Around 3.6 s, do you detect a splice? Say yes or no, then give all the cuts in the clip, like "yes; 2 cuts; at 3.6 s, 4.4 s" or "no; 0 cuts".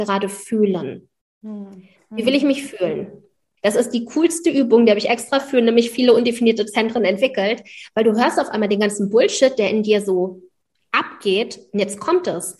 yes; 1 cut; at 3.6 s